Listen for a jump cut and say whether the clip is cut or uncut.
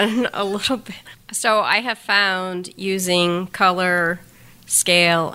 cut